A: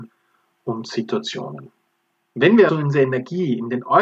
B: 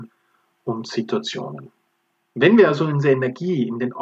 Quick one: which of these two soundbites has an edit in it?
A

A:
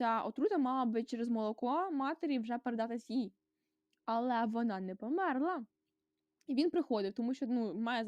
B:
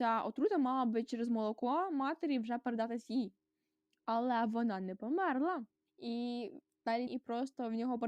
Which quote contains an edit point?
B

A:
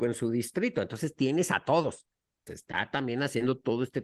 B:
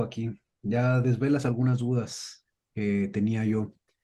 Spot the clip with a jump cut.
A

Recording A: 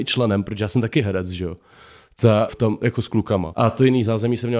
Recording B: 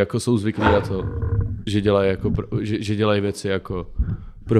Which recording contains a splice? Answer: A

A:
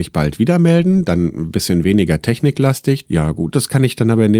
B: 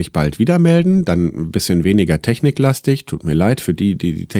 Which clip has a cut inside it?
A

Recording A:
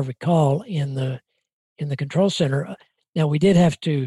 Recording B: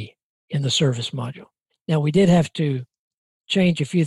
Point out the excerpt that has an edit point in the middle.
B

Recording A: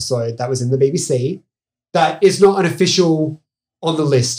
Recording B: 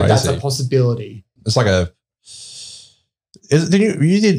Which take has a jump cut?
B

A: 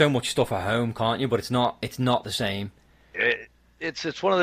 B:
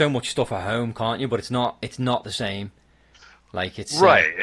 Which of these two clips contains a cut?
A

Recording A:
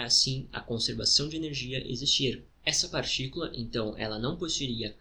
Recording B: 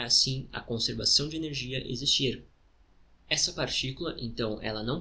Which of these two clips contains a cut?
A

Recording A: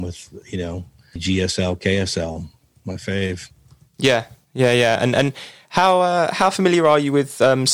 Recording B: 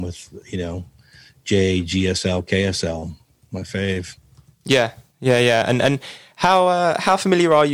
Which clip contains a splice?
A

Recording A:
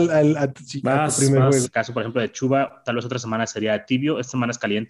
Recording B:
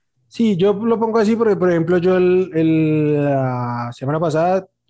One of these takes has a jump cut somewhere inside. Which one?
A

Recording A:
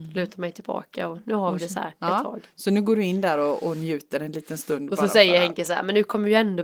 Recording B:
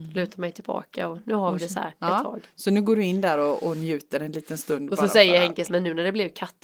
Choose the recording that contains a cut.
B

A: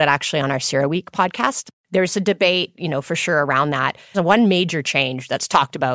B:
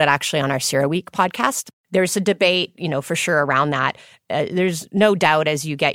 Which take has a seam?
A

